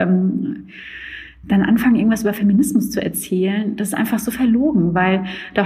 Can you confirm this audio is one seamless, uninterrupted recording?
yes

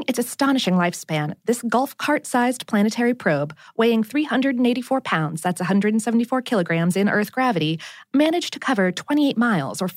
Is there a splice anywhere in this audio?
no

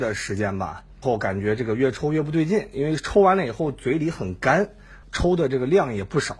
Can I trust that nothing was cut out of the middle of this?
no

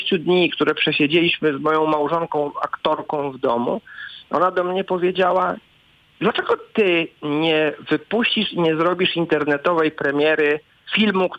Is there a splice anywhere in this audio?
no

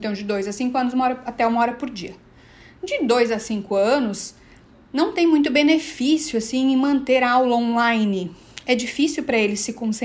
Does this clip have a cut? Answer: no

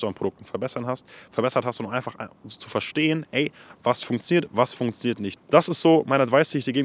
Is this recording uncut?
no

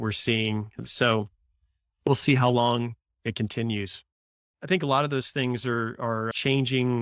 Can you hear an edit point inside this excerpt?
yes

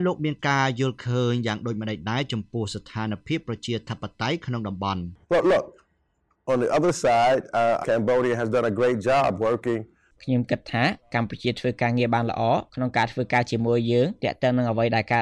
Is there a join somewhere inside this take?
yes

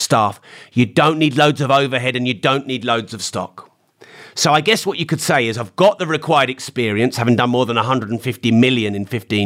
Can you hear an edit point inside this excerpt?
no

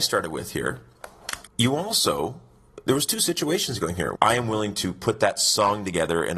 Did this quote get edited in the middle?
yes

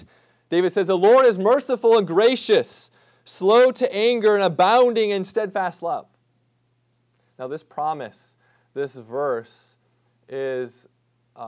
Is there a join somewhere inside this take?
no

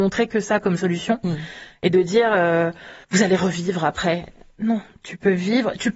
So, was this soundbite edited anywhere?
yes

